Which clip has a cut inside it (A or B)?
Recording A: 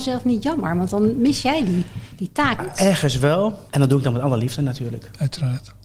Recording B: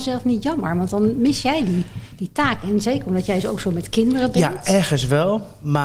A